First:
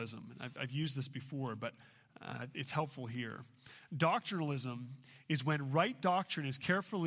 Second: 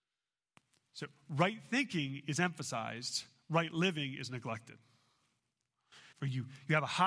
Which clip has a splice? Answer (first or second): second